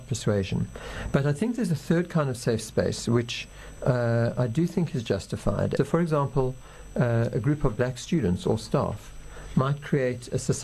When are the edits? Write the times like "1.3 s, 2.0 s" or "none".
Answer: 5.8 s